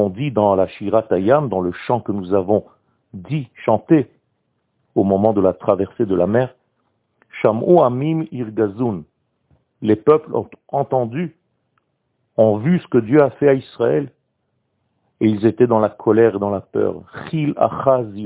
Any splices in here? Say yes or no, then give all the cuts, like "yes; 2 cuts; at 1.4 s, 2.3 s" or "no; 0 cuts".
yes; 1 cut; at 4.8 s